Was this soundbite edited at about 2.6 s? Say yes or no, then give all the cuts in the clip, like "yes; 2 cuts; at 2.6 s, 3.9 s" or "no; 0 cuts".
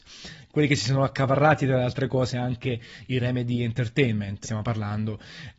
no; 1 cut; at 4.4 s